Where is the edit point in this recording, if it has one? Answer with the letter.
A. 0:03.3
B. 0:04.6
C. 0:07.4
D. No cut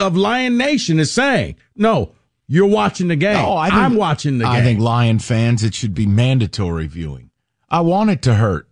D